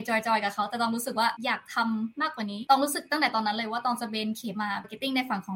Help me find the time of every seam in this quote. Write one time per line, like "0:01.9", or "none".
0:04.5